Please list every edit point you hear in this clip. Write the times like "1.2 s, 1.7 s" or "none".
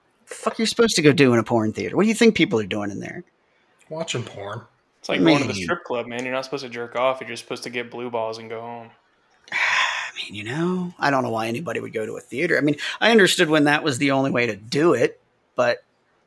none